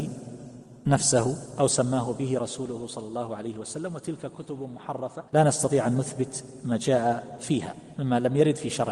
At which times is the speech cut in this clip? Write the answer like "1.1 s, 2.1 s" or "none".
5.3 s